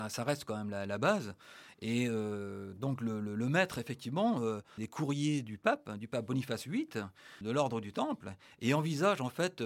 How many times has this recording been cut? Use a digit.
2